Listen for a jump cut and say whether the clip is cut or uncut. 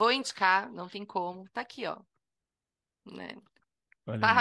uncut